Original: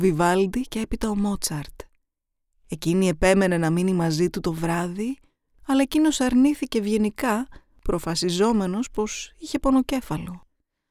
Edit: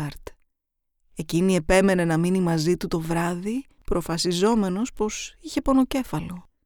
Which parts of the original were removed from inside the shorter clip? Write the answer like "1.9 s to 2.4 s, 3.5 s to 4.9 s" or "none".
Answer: 5.3 s to 7.8 s